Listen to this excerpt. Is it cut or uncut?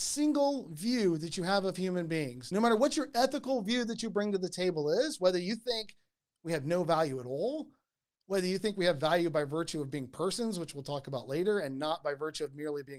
uncut